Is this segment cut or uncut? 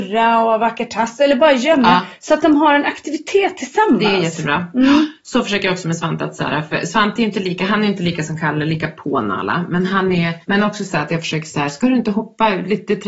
cut